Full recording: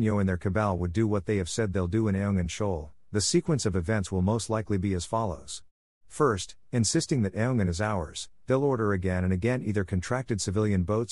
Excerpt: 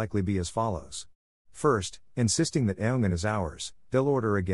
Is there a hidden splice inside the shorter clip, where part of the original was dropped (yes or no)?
no